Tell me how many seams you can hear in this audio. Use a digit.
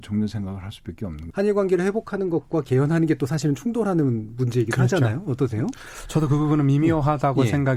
1